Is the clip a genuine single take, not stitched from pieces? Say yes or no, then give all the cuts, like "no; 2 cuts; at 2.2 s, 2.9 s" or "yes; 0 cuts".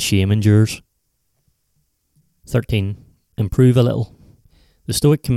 yes; 0 cuts